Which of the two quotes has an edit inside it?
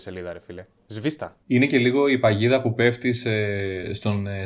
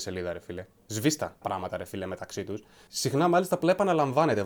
second; 2 cuts; at 1.4 s, 2.9 s

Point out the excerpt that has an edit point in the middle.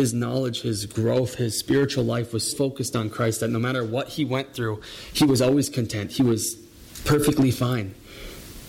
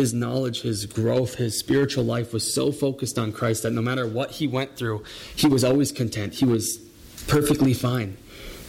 first; 1 cut; at 2.5 s

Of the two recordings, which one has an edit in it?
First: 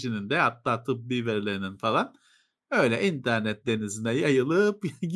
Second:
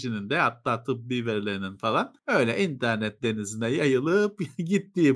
second; 1 cut; at 2.2 s

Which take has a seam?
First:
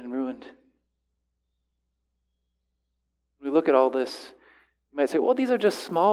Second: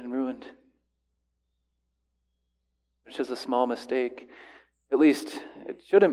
second; 1 cut; at 3.0 s

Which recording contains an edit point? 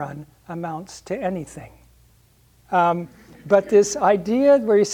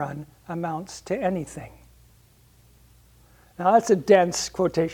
first; 1 cut; at 2.6 s

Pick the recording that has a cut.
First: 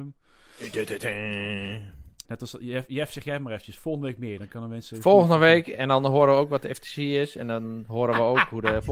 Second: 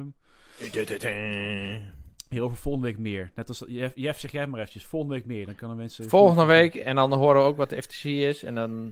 first; 1 cut; at 2.2 s

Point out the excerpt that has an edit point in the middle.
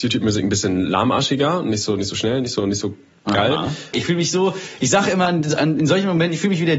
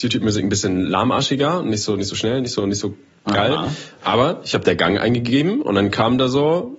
first; 1 cut; at 3.9 s

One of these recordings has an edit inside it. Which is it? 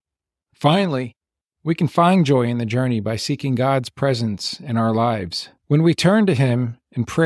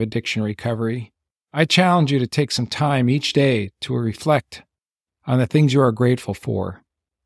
first; 1 cut; at 5.6 s

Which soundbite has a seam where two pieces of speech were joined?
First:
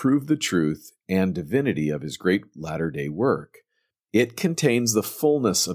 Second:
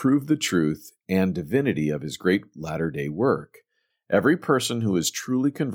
second; 1 cut; at 3.9 s

